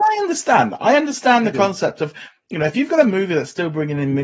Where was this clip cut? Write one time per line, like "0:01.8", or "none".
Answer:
none